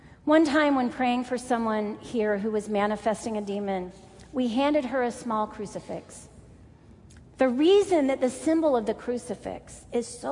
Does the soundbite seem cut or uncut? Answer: cut